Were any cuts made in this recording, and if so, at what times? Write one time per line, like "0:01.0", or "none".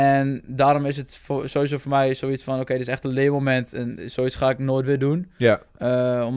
none